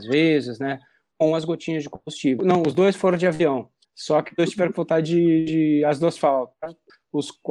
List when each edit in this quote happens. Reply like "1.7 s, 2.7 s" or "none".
2.4 s